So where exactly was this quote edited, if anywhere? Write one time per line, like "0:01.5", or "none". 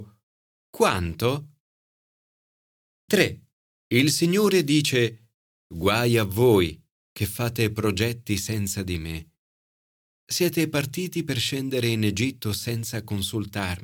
0:03.8